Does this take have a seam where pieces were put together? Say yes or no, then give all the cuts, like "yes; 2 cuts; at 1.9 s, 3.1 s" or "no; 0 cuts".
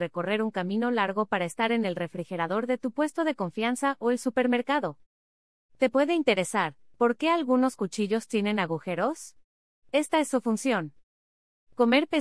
no; 0 cuts